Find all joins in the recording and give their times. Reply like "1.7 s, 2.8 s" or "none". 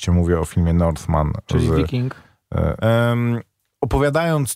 2.8 s

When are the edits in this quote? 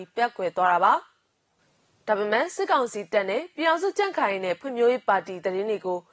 none

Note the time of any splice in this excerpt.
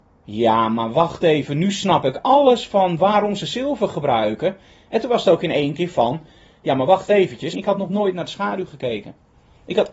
7.5 s

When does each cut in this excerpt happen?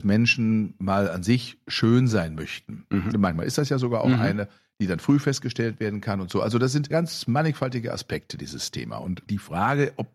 3.1 s

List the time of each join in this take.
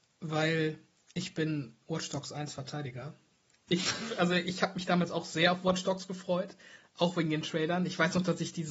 3.7 s

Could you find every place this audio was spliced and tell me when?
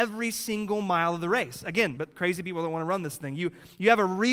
2.0 s

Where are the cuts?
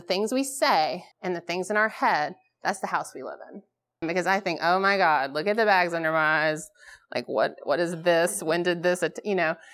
1.1 s, 4.0 s

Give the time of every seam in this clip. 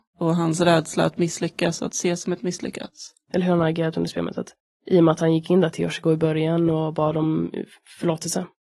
3.2 s

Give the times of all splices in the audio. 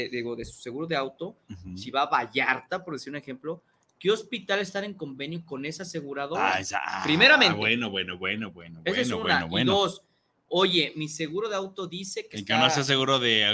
none

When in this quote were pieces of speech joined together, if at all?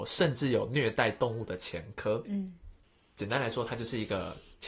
2.3 s

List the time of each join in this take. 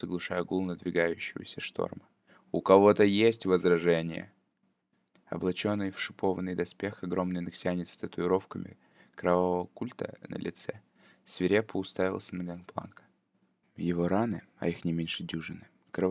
13.6 s

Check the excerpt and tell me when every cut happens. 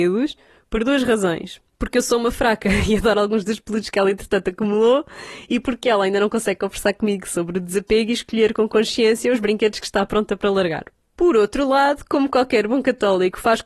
11.0 s

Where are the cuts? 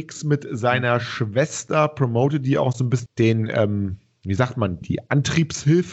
3.1 s, 4.8 s

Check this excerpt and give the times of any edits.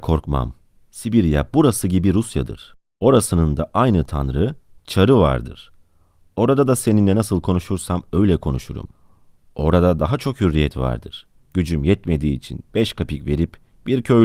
11.4 s

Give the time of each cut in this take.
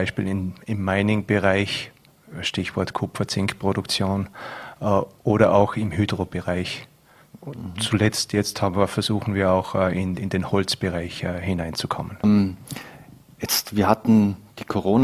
12.2 s

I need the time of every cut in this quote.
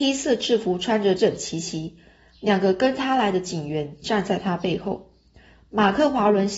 1.2 s

